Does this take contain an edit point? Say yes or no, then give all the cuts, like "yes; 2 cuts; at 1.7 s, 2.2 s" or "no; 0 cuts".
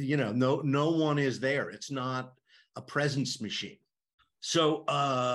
yes; 1 cut; at 4.2 s